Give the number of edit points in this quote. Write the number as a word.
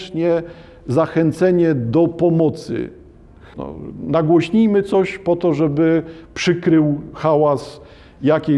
one